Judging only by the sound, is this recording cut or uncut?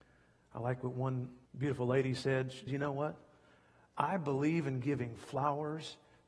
cut